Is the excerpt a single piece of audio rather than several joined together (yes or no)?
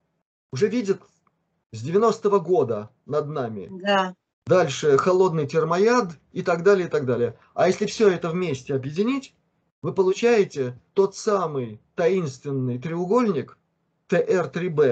no